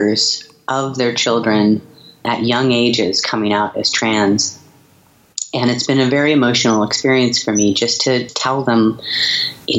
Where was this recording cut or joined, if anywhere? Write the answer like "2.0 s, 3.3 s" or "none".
2.2 s, 8.3 s